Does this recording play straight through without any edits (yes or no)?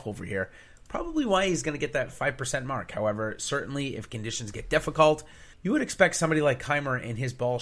no